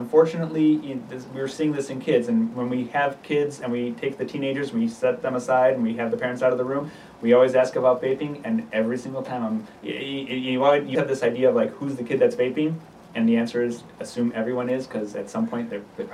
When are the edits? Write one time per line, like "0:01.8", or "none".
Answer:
0:09.8
0:10.9